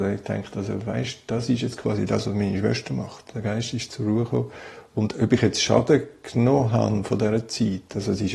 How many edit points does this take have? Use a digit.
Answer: 1